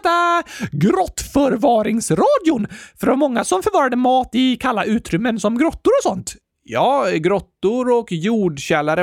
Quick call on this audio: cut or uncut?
uncut